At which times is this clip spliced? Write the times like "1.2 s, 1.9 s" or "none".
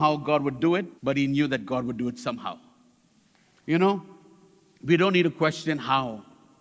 1.0 s, 3.6 s